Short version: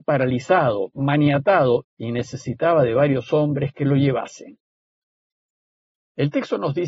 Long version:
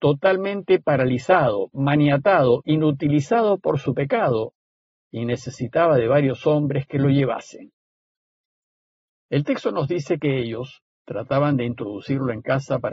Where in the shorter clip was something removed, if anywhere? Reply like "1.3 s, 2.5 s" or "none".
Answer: 1.8 s